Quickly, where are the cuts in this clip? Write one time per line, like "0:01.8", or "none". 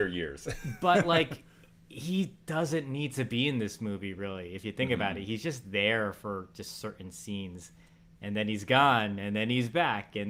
none